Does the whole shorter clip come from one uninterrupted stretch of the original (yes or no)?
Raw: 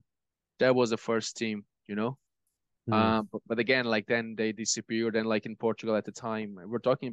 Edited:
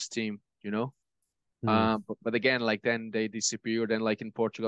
yes